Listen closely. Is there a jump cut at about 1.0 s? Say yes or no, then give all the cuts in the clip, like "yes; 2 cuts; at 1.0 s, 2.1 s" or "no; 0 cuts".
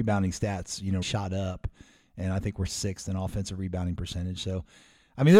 yes; 1 cut; at 1.0 s